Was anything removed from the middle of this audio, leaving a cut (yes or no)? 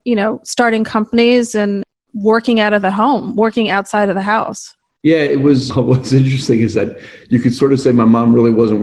no